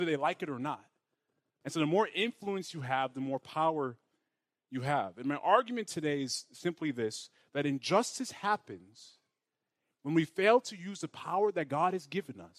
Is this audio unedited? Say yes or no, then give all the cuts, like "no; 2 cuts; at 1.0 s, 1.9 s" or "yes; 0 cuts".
no; 1 cut; at 1.6 s